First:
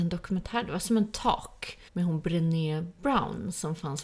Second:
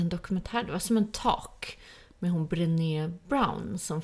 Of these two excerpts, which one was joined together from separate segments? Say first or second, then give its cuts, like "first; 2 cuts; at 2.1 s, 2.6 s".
first; 1 cut; at 1.9 s